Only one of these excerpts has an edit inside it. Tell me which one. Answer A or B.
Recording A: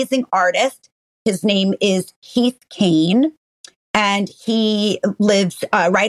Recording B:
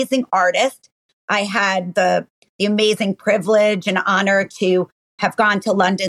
B